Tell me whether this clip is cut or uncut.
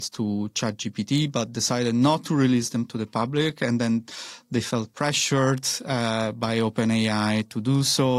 uncut